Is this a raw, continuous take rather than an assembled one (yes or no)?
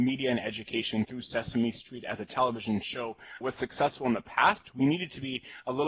yes